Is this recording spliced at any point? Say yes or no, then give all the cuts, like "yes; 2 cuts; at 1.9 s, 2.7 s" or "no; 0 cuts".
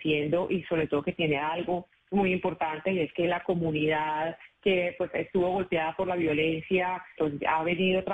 yes; 1 cut; at 7.2 s